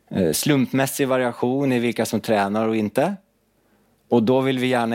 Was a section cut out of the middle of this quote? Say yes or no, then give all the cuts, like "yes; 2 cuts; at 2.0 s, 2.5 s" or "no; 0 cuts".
no; 0 cuts